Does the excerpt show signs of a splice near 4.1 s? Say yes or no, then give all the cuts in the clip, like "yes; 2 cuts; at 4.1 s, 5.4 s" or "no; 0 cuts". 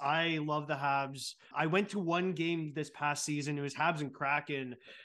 no; 1 cut; at 1.5 s